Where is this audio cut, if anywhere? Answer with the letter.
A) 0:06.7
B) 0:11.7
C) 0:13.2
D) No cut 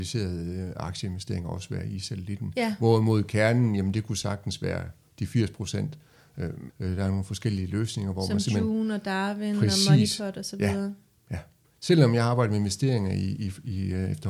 A